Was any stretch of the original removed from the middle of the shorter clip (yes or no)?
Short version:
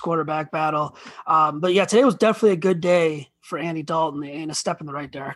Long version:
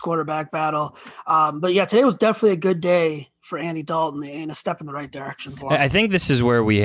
no